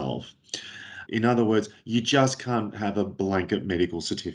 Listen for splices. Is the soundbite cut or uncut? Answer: cut